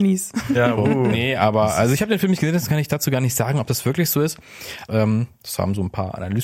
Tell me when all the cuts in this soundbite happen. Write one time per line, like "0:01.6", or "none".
0:01.1
0:04.9